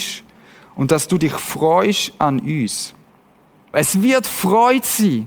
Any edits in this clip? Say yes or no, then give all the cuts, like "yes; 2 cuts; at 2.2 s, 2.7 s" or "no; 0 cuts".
yes; 1 cut; at 3.7 s